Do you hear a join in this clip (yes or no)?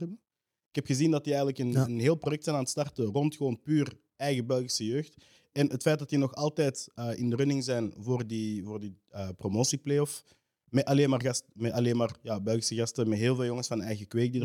no